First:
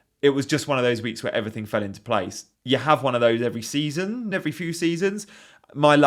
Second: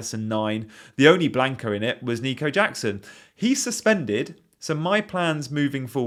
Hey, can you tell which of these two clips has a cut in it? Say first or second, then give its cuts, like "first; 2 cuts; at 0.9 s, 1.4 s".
first; 2 cuts; at 2.5 s, 4.3 s